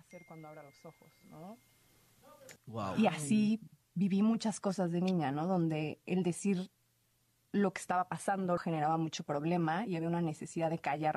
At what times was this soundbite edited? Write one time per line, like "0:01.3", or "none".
0:02.6
0:08.6